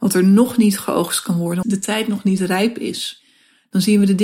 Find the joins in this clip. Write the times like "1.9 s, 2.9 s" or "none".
1.6 s